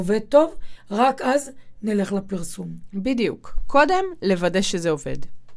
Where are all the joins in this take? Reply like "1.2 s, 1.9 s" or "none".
none